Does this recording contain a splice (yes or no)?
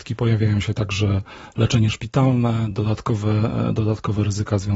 no